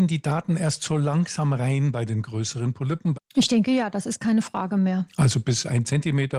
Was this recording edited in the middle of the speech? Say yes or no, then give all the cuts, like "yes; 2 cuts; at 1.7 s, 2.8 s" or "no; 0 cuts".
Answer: yes; 1 cut; at 3.1 s